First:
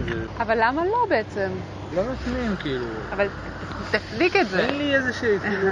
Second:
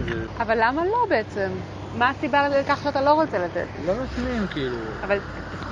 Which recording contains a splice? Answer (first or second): first